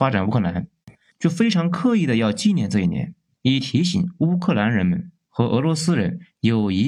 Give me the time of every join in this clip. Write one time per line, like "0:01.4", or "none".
0:01.1